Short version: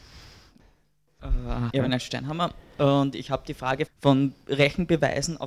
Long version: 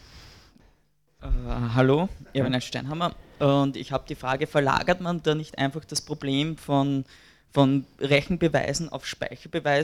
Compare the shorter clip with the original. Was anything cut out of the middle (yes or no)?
yes